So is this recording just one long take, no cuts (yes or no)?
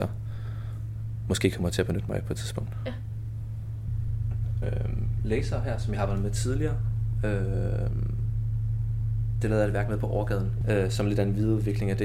no